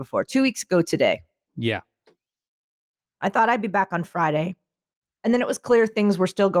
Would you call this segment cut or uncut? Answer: uncut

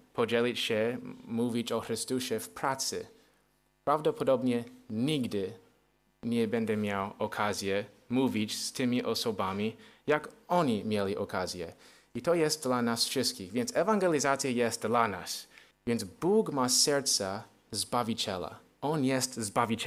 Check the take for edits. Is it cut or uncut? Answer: cut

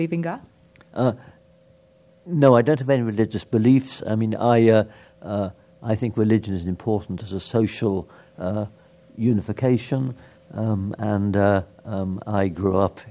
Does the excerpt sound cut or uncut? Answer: uncut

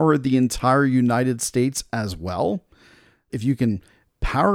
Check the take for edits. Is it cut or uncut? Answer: cut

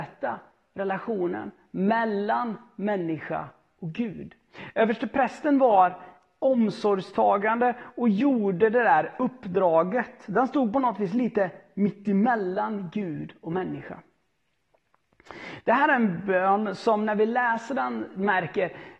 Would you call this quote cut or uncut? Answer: uncut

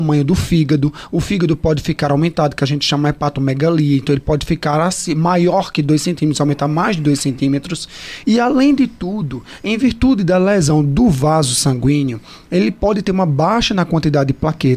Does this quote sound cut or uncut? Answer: cut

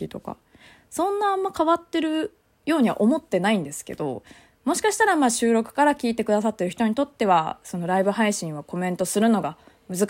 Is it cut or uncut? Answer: uncut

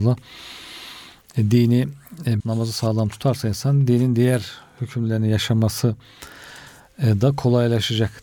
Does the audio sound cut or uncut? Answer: cut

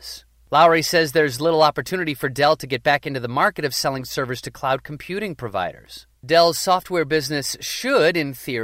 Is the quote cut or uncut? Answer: uncut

